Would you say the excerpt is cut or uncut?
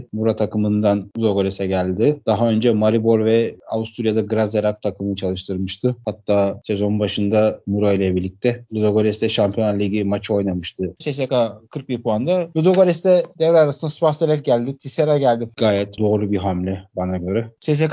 cut